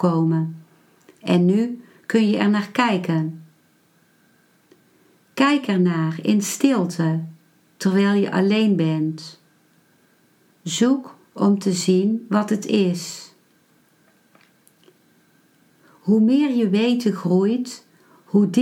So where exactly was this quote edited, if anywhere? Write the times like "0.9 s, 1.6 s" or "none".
none